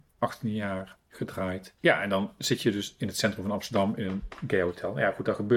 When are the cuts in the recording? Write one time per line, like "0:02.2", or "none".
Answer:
0:01.8